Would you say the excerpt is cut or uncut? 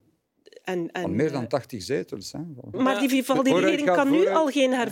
cut